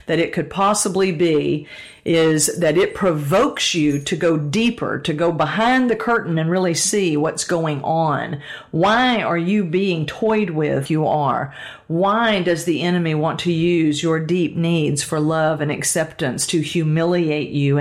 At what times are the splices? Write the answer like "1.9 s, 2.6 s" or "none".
10.9 s